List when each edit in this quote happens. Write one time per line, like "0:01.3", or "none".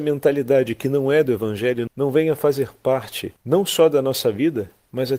0:01.9
0:03.4